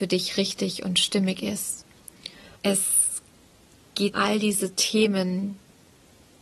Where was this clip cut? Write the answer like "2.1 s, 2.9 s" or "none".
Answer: 2.6 s, 4.1 s